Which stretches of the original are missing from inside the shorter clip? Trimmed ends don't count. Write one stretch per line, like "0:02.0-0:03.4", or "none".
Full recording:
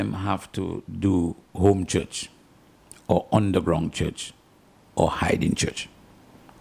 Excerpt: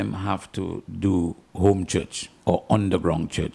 0:02.4-0:03.0